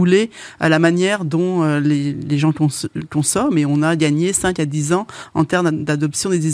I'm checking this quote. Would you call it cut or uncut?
uncut